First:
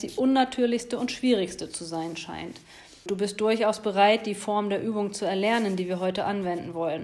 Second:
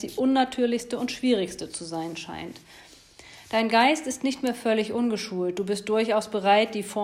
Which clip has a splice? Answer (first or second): first